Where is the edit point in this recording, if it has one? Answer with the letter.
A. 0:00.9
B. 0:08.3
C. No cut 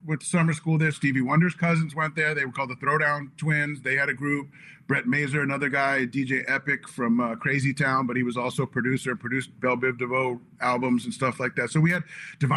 A